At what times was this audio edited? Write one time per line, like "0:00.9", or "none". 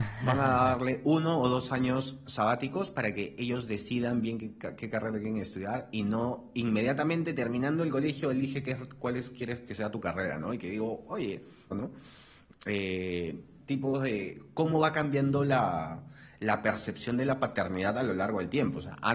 0:11.7
0:13.6